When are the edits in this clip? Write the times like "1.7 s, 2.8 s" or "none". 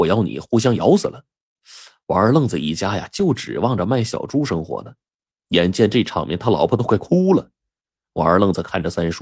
none